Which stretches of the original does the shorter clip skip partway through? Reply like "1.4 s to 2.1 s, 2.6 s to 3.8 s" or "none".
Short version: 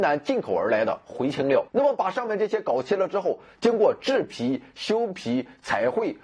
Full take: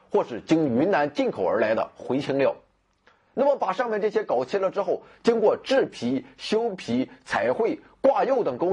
2.6 s to 3.3 s